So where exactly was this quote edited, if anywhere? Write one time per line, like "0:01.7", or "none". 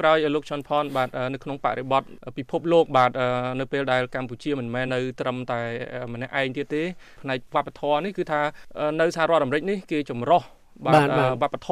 0:04.9